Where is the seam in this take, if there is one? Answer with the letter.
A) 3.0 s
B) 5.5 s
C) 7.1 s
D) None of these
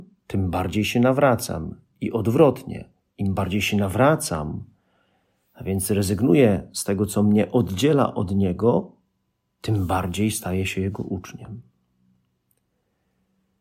D